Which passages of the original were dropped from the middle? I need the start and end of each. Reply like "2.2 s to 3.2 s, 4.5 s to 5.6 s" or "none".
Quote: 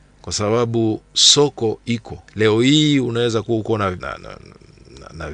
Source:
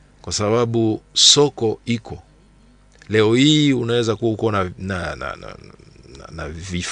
2.3 s to 3.0 s, 4.7 s to 5.2 s